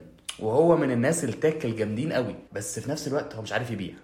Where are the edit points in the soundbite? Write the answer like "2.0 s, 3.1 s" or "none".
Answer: 2.5 s